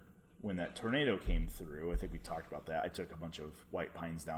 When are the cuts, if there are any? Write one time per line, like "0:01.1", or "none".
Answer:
none